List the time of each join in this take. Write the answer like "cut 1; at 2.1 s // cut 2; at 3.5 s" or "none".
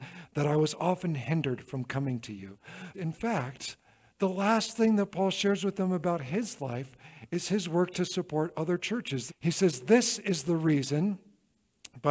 cut 1; at 2.9 s // cut 2; at 9.3 s